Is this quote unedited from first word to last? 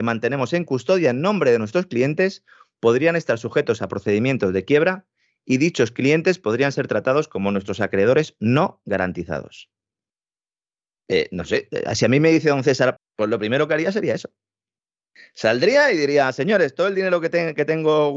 no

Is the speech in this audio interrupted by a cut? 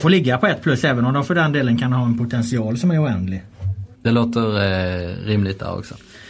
yes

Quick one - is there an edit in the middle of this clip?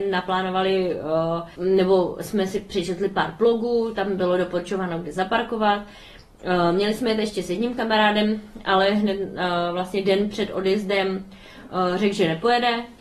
yes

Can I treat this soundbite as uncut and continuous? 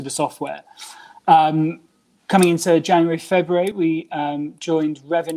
yes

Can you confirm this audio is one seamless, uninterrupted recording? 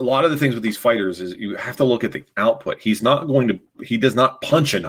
yes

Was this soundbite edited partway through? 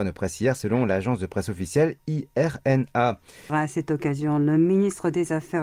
yes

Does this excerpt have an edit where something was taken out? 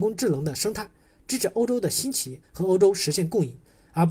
yes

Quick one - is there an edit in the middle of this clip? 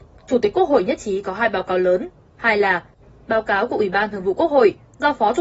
yes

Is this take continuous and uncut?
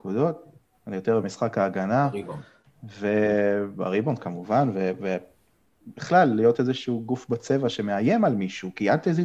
yes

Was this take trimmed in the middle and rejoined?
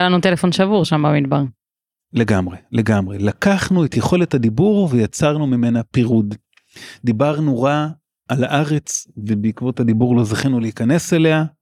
no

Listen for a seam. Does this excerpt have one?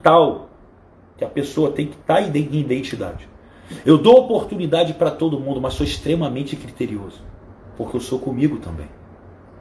yes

